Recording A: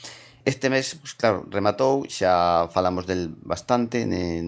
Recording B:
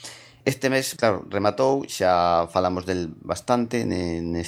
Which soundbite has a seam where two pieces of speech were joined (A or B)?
B